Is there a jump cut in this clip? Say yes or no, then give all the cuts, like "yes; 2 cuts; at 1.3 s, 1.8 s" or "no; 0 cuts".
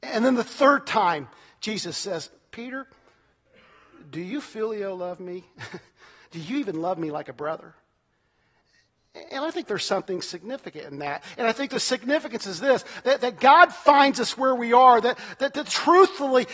no; 0 cuts